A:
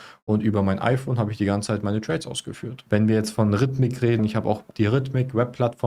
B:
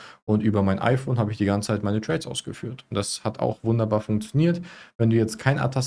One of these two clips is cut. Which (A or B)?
A